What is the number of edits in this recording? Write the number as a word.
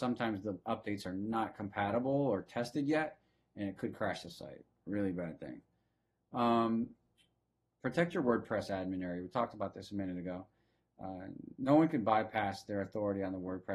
zero